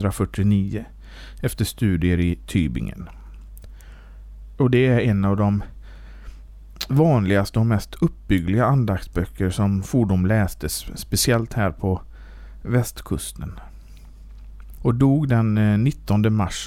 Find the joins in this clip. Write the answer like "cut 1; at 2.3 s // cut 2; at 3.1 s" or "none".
cut 1; at 4.6 s // cut 2; at 14.8 s